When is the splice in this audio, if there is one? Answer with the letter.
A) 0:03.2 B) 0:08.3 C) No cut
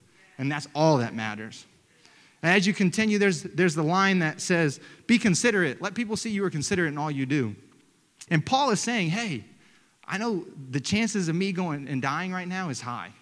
B